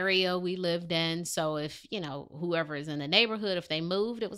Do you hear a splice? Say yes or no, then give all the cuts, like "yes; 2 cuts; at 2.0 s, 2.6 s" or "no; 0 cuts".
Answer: no; 0 cuts